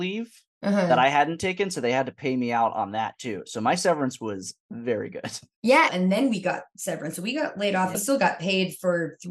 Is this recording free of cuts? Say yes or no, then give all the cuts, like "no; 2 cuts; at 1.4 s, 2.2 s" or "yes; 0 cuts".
no; 2 cuts; at 5.9 s, 7.9 s